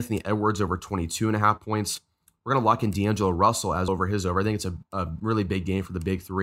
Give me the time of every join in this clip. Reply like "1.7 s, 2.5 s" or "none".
3.9 s